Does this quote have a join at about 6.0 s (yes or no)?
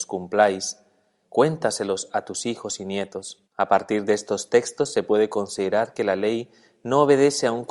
no